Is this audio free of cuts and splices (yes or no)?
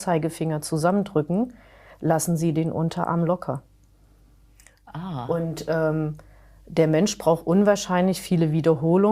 yes